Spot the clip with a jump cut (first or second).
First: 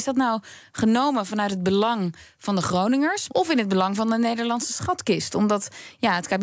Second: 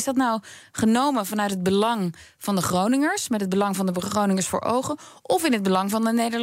first